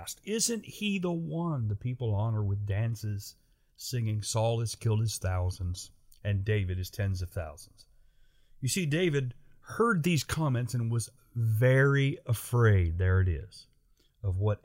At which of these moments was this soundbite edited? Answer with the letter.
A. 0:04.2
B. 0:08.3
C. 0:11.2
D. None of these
D